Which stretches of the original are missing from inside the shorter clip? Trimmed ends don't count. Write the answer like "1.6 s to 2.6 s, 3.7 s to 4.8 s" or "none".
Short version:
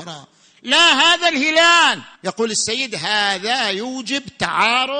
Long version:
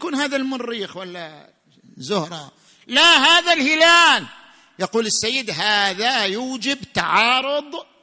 4.4 s to 4.7 s